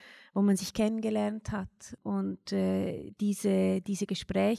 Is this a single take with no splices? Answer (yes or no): yes